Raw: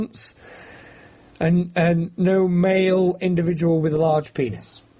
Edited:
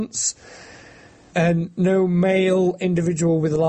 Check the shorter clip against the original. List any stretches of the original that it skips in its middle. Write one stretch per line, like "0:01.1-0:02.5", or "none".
0:01.3-0:01.7